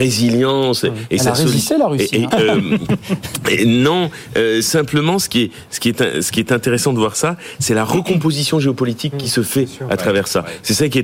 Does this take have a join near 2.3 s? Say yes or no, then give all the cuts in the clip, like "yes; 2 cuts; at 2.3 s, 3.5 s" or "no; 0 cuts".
yes; 1 cut; at 2.3 s